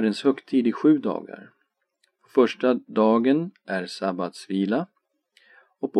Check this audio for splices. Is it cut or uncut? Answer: uncut